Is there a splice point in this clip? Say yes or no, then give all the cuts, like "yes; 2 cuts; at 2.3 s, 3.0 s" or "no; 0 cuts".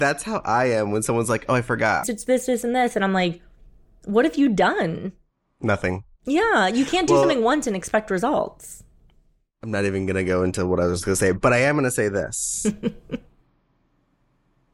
yes; 1 cut; at 2.0 s